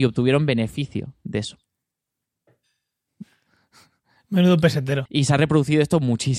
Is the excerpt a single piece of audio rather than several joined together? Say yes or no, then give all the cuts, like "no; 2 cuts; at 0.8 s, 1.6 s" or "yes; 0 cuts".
no; 1 cut; at 5.1 s